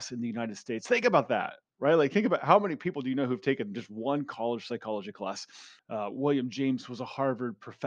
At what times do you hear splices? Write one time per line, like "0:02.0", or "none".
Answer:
0:05.8